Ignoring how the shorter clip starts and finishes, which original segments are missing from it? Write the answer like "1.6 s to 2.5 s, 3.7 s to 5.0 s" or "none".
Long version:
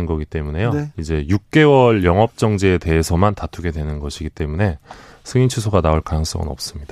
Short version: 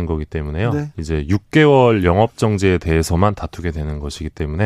none